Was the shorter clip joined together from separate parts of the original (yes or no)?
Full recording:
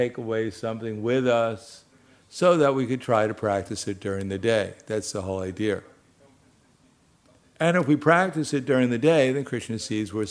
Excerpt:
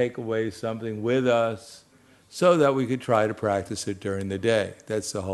no